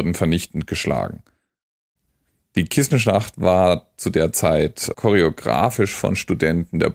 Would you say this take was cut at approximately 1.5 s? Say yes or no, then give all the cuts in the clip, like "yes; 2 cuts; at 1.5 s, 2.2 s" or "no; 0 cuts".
no; 1 cut; at 4.9 s